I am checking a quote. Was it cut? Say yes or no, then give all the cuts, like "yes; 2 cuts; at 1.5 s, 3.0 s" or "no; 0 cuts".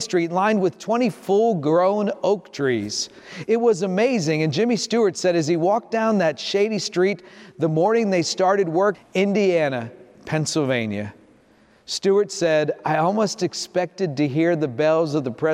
yes; 1 cut; at 8.9 s